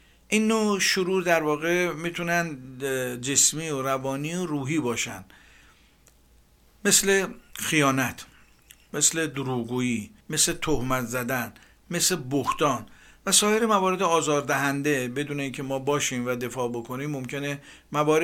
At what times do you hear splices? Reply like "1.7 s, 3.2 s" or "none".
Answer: 10.2 s